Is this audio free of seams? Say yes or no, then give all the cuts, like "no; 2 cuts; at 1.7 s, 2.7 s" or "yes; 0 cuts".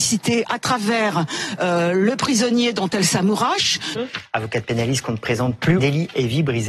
no; 2 cuts; at 3.9 s, 5.8 s